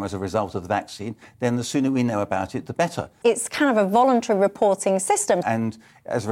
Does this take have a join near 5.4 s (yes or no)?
yes